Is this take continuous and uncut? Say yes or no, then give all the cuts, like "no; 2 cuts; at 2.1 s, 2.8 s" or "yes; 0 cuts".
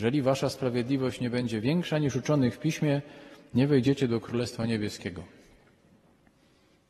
yes; 0 cuts